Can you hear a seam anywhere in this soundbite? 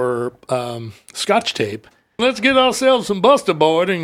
yes; 1 cut; at 2.2 s

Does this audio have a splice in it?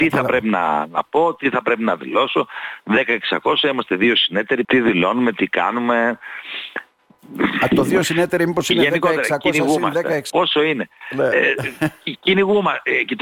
yes; 2 cuts; at 4.6 s, 10.3 s

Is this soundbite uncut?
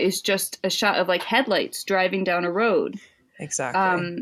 yes; 0 cuts

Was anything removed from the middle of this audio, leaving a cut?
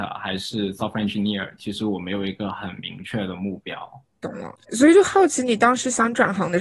yes; 1 cut; at 4.6 s

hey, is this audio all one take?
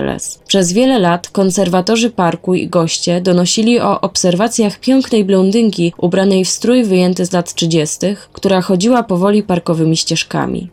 yes; 0 cuts

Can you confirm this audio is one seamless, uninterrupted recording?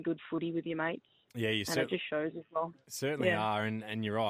yes; 0 cuts

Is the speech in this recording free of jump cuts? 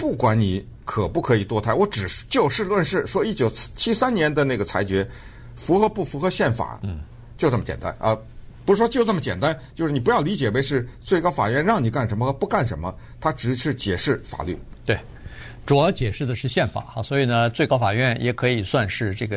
no; 1 cut; at 6.8 s

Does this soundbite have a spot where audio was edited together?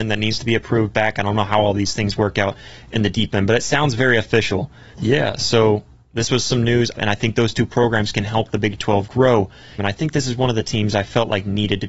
yes; 3 cuts; at 4.9 s, 6.9 s, 9.8 s

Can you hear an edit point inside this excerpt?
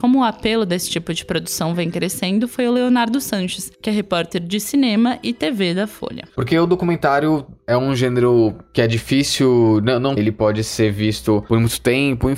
yes; 2 cuts; at 6.3 s, 10.2 s

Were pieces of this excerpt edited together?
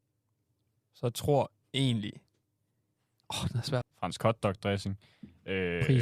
yes; 1 cut; at 3.8 s

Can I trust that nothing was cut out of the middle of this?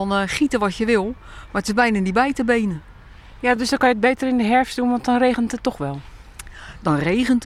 yes; 0 cuts

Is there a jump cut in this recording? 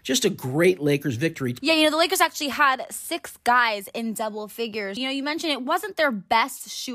yes; 2 cuts; at 1.6 s, 5.0 s

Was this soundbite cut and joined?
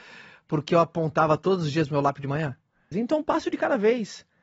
yes; 1 cut; at 2.9 s

